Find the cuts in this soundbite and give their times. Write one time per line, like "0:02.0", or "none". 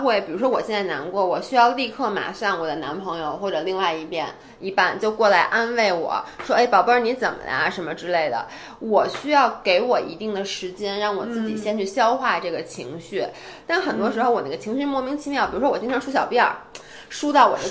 0:13.6